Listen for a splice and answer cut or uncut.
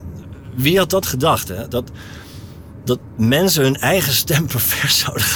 uncut